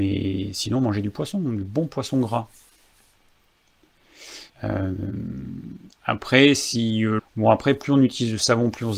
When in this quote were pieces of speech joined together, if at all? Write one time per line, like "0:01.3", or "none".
0:04.5
0:07.2